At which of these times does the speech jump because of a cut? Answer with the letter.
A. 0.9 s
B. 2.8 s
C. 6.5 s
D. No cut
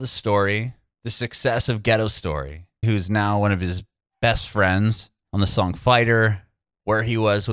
B